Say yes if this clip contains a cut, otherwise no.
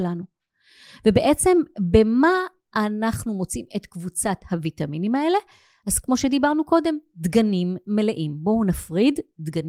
no